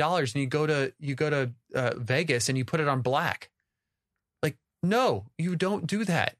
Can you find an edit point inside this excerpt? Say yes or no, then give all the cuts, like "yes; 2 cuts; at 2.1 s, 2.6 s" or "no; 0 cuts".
no; 0 cuts